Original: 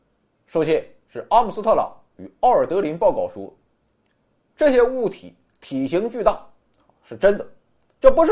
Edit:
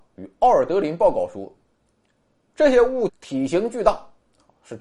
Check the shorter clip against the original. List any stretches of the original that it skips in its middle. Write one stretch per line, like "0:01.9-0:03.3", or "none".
0:05.1-0:05.5